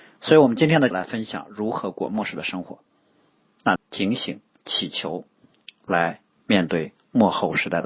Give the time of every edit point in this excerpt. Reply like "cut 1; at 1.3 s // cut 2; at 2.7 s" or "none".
cut 1; at 0.9 s // cut 2; at 3.8 s